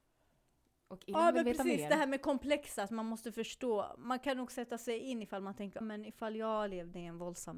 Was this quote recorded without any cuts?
no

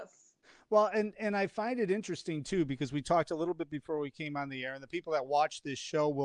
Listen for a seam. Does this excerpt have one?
no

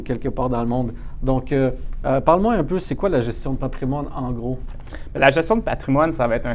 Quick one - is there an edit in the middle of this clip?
yes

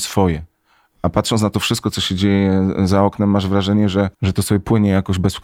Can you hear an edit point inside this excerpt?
yes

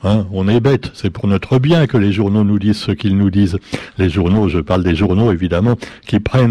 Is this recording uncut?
yes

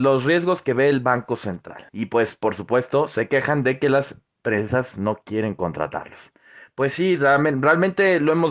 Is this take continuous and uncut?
no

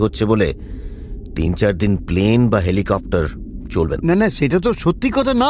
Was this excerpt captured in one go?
no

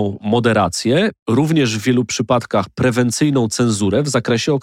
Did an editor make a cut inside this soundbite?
yes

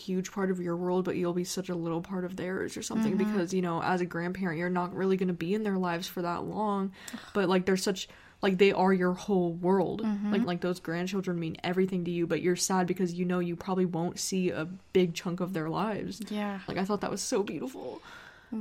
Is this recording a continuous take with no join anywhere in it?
no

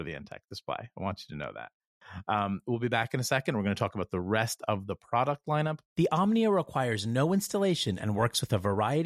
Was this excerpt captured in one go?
no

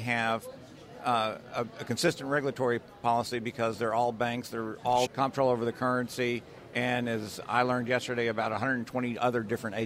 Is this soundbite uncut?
no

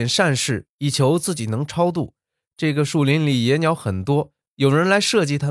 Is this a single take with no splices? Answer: yes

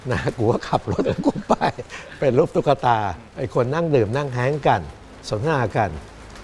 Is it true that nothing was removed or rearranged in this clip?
no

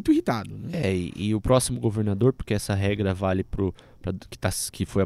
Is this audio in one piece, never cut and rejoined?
yes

